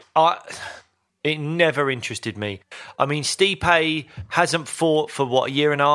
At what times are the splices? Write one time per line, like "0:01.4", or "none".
0:01.1